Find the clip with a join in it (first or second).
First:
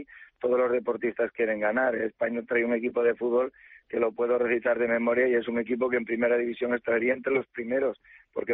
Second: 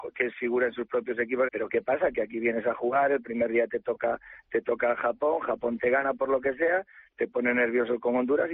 second